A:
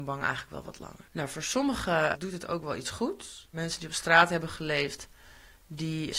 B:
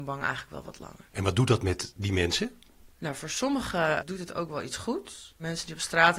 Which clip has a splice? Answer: A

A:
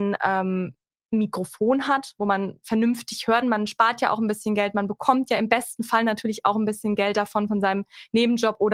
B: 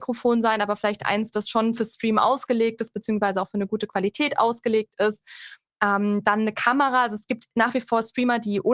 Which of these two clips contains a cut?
A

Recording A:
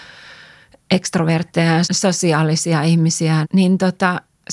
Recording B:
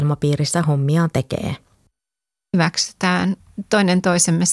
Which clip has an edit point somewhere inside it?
A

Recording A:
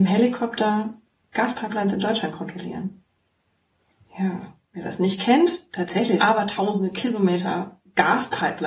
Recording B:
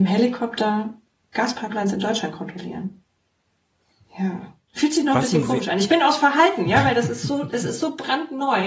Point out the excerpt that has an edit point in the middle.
A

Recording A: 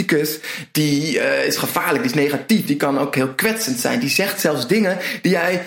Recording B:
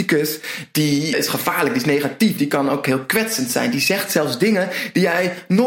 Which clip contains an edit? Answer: B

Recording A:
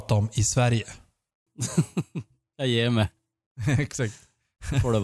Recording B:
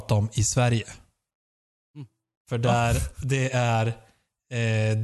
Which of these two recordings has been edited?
A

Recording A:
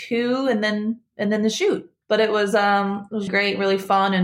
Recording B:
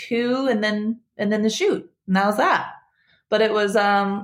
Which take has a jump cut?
A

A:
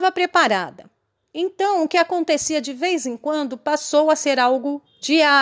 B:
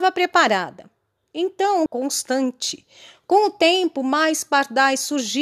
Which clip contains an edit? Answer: B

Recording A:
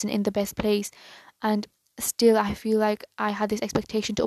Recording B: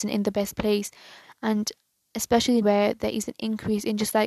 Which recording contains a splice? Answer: B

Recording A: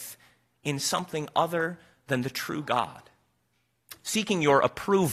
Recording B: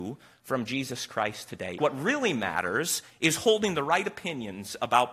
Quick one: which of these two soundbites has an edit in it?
B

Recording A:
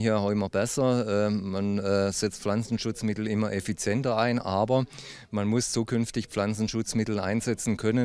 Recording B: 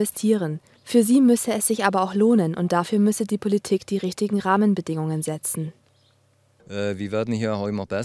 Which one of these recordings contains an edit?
B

